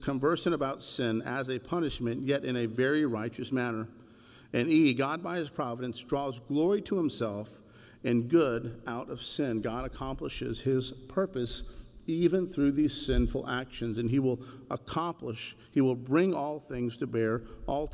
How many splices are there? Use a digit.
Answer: 0